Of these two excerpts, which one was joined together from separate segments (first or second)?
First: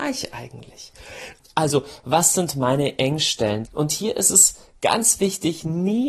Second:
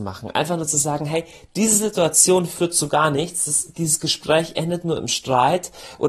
first